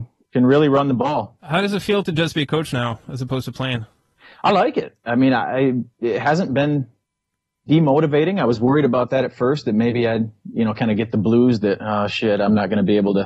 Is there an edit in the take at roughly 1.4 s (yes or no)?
yes